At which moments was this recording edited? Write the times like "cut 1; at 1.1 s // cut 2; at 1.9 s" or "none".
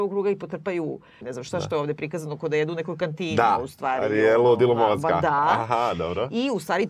cut 1; at 1.2 s